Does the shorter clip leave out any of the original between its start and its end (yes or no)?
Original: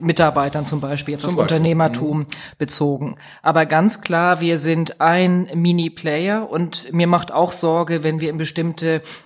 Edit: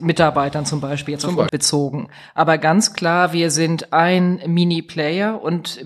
yes